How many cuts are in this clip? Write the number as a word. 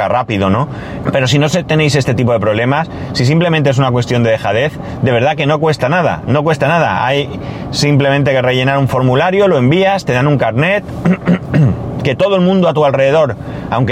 one